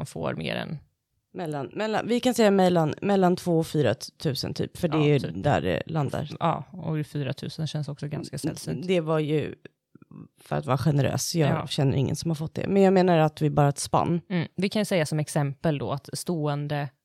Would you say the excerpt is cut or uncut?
uncut